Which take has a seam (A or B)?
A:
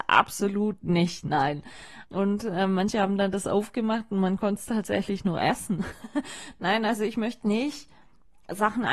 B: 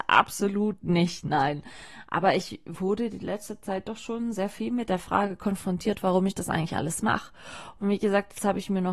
A